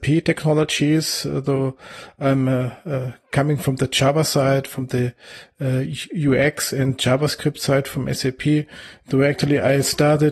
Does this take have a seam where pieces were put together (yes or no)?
no